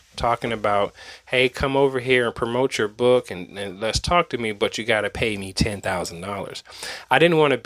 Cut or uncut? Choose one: uncut